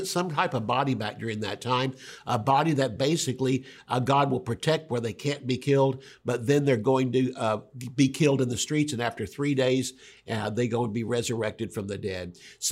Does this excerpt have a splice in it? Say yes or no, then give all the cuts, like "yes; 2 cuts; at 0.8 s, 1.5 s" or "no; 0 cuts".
no; 0 cuts